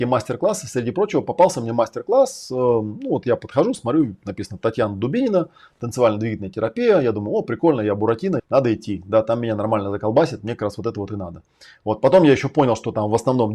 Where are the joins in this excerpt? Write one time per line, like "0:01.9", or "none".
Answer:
0:08.4